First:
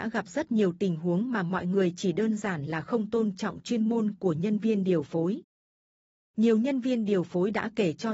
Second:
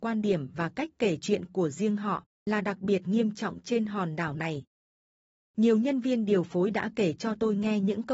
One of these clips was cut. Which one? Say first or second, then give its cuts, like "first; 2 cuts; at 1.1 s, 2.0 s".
first; 1 cut; at 6.2 s